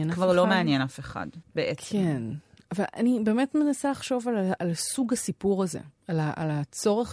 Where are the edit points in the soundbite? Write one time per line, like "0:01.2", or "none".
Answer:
0:04.6